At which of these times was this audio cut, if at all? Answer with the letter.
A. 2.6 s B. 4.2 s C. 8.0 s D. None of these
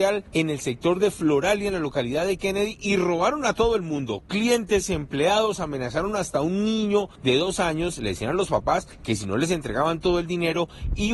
D